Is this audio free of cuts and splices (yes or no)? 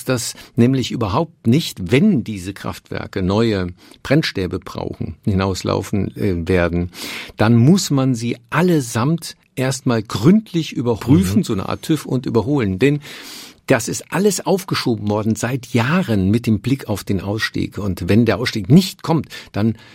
no